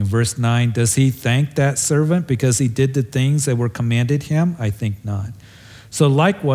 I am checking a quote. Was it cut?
no; 0 cuts

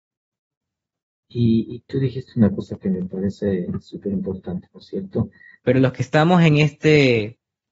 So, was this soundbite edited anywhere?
yes; 2 cuts; at 1.3 s, 5.6 s

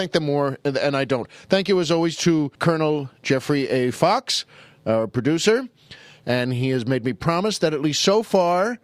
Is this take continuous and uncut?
no; 1 cut; at 2.5 s

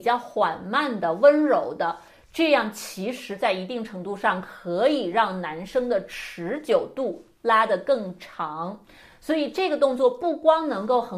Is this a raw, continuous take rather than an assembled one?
yes; 0 cuts

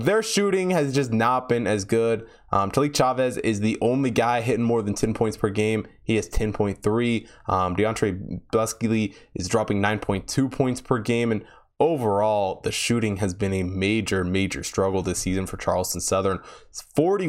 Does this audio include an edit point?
no; 0 cuts

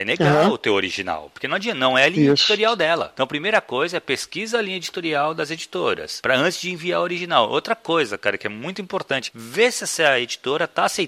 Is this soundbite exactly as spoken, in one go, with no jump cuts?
yes; 0 cuts

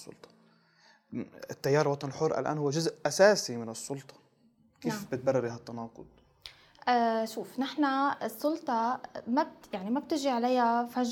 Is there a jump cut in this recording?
no; 0 cuts

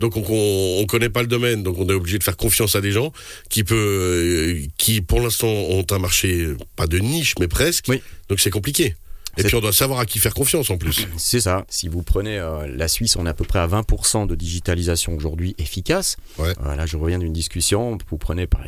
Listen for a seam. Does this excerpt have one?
yes; 2 cuts; at 11.7 s, 16.6 s

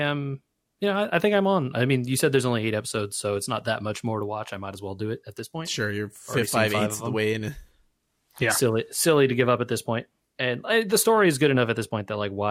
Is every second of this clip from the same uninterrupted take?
yes; 0 cuts

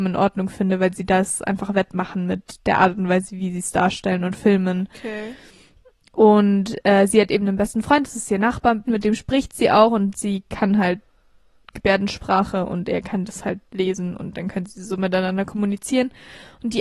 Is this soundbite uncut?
no; 2 cuts; at 8.8 s, 13.7 s

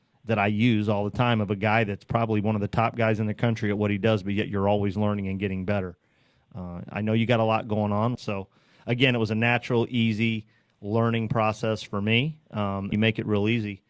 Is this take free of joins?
no; 2 cuts; at 8.1 s, 12.9 s

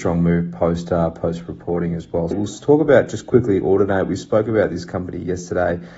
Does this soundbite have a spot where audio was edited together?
yes; 1 cut; at 2.3 s

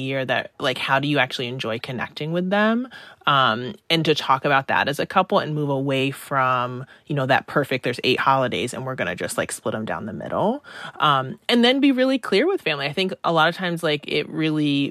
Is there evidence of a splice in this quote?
no; 0 cuts

